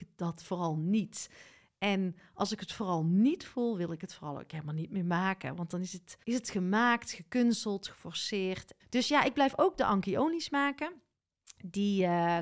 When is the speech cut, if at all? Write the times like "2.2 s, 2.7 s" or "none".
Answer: 6.2 s, 8.8 s